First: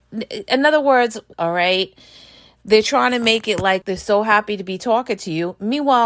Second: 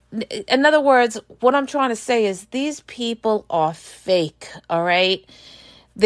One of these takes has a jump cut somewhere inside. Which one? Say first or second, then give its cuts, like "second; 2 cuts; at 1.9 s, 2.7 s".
first; 2 cuts; at 1.3 s, 3.8 s